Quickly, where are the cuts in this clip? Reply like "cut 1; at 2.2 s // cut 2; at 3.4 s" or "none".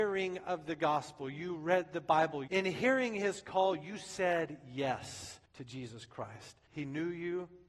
cut 1; at 2.5 s // cut 2; at 5.4 s // cut 3; at 6.7 s